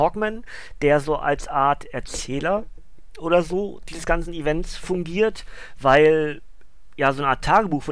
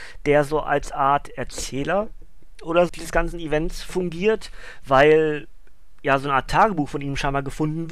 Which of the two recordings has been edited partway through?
second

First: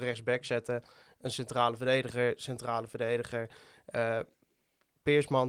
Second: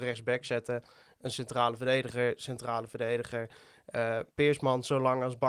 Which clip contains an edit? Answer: second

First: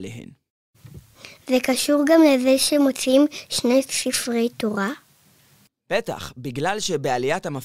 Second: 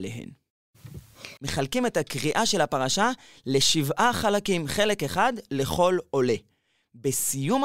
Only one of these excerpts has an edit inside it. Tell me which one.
second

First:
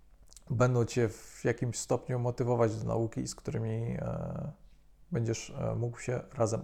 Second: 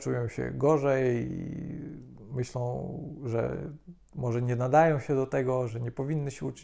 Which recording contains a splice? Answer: second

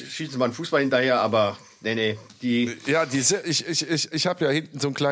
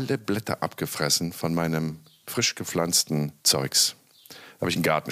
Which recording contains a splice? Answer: second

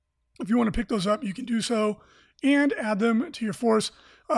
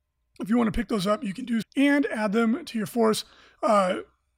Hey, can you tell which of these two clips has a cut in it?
second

